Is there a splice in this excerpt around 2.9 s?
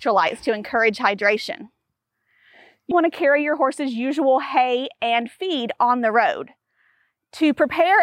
yes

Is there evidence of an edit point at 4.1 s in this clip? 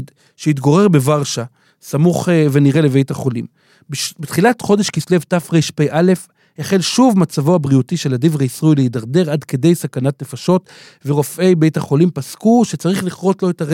no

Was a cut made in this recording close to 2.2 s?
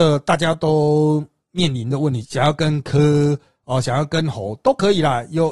yes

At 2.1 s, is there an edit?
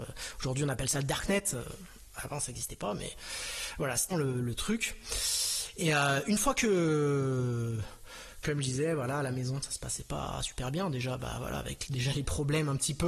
no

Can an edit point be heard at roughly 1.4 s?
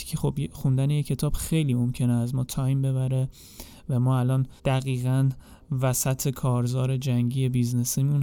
no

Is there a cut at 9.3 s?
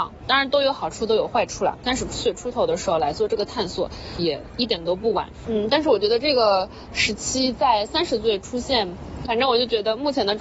yes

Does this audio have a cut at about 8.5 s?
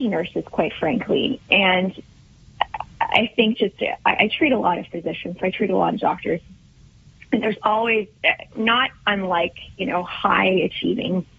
yes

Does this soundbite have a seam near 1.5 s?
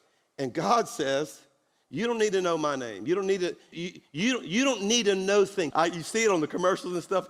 no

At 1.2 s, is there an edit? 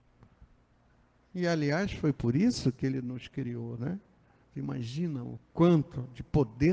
no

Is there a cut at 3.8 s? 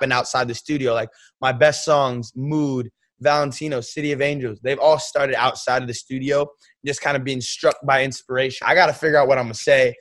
no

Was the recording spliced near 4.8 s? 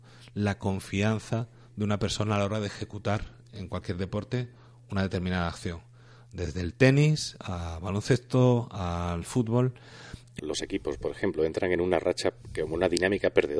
no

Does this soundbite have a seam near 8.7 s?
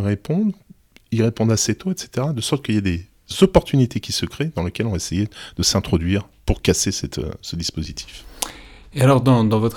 no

